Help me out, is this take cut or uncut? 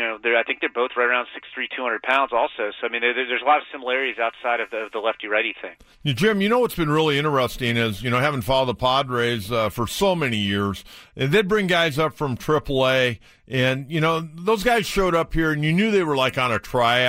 uncut